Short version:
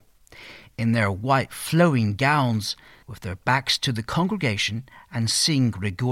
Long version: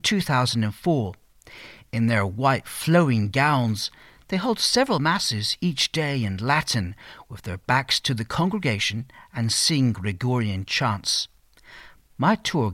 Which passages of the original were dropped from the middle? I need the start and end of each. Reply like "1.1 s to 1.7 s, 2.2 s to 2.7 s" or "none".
4.2 s to 7.2 s